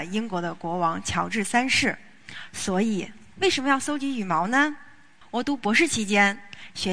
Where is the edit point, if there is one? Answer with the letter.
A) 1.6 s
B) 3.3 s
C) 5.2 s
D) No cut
B